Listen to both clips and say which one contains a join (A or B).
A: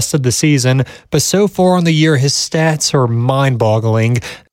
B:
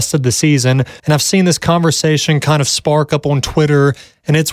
B